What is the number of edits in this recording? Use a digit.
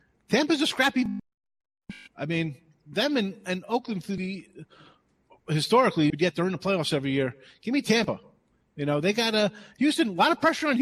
1